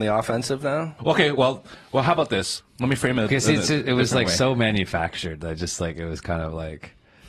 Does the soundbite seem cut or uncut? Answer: cut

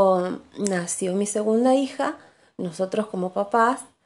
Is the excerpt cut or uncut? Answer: uncut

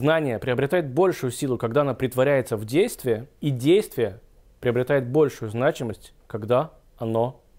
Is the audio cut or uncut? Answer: cut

